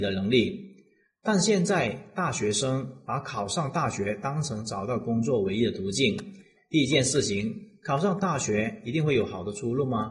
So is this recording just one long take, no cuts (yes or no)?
no